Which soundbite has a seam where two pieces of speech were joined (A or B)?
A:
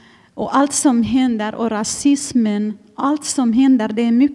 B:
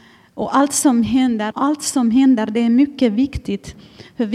B